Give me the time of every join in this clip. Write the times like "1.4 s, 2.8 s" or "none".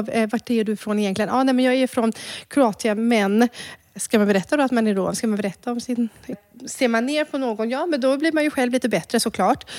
6.3 s